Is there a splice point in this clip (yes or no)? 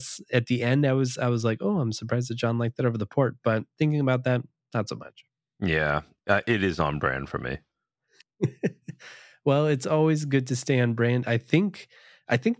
no